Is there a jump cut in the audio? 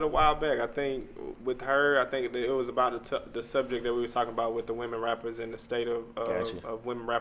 yes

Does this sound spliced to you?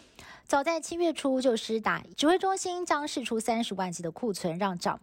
yes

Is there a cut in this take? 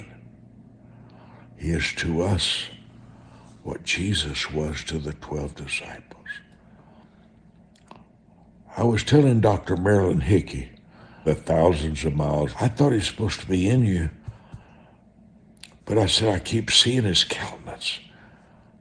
yes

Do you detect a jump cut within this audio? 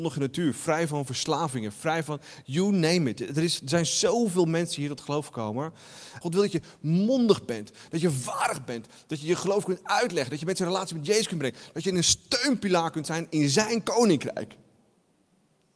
yes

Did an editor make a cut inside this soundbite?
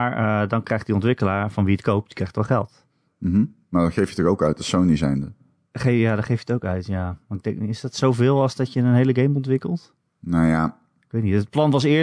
no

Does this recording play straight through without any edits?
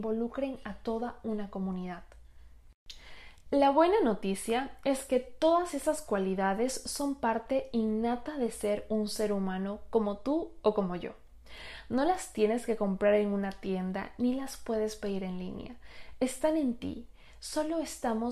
yes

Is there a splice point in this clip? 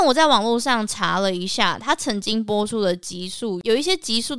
no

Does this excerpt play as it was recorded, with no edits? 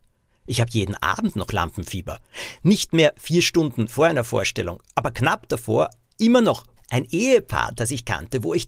no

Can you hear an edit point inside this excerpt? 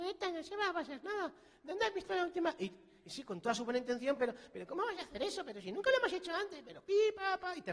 no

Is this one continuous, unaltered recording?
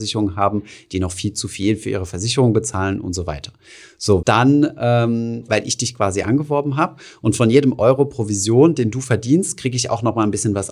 no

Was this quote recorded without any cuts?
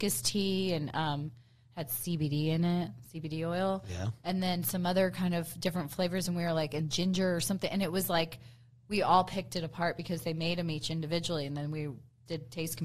yes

